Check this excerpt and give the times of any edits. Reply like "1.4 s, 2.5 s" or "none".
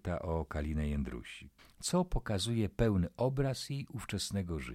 1.6 s

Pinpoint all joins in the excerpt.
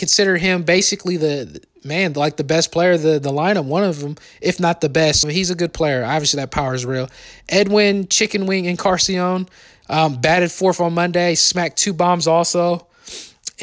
5.2 s

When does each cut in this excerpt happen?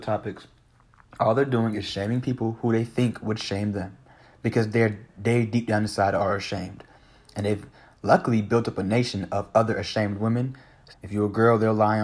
10.9 s

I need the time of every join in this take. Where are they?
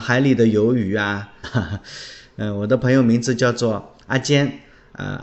1.4 s

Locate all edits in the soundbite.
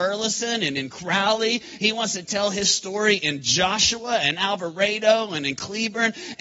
none

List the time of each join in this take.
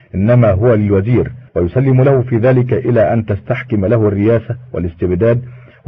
1.5 s

